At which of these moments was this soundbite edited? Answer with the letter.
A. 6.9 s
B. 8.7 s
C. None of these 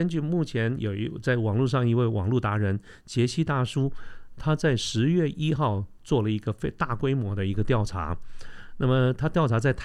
C